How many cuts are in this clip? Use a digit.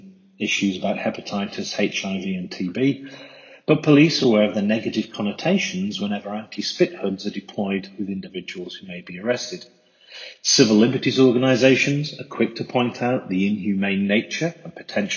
1